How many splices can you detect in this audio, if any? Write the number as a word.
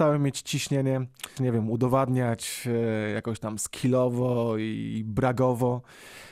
one